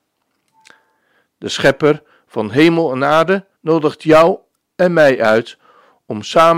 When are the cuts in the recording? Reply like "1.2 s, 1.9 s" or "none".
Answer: 3.5 s